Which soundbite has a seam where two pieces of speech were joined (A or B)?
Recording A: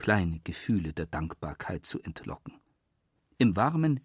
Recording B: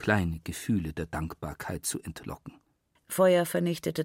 B